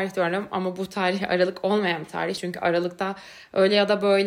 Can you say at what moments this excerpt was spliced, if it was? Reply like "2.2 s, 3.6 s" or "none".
none